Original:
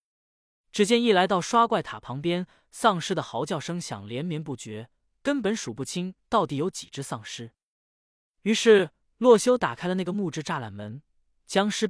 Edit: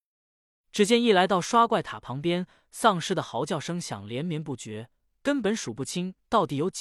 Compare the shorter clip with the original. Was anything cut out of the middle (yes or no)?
no